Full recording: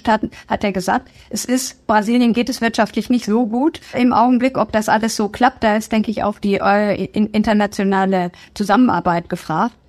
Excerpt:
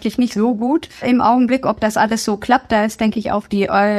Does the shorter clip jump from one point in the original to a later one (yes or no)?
no